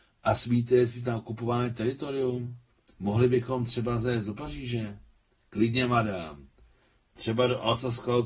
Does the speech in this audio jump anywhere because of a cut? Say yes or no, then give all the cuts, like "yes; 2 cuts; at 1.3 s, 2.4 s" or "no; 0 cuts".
no; 0 cuts